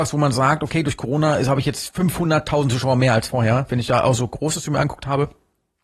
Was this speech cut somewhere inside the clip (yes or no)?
yes